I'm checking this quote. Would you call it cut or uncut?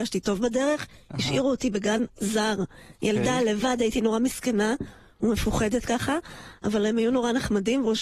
uncut